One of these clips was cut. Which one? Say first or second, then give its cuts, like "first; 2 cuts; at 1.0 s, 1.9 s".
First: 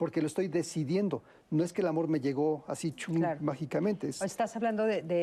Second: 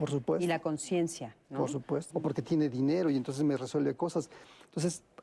second; 1 cut; at 2.1 s